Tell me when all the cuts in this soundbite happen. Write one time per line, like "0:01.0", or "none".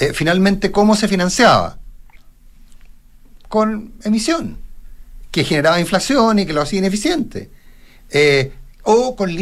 none